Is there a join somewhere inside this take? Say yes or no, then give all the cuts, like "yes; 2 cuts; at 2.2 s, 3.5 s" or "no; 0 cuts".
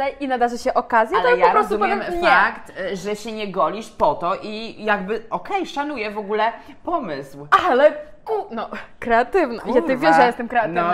no; 0 cuts